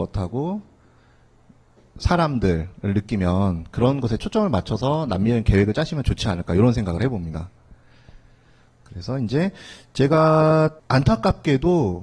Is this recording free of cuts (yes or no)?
no